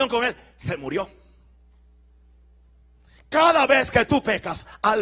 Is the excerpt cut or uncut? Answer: uncut